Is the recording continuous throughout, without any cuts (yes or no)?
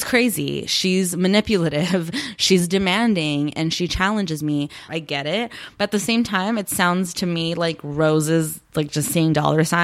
no